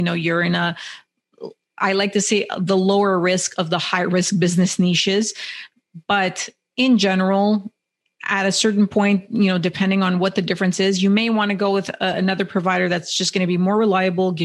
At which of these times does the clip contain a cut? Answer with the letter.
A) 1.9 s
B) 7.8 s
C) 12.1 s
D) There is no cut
D